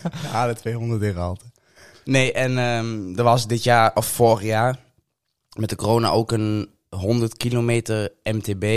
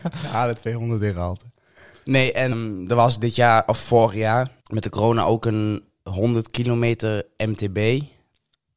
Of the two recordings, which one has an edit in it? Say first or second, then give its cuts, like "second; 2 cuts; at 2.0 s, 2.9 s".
second; 2 cuts; at 2.5 s, 4.6 s